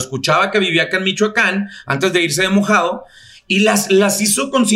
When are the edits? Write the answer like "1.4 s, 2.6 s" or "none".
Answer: none